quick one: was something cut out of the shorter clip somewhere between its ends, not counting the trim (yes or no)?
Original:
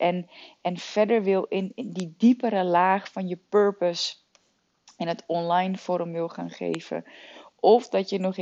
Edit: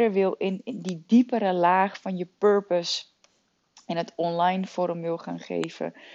no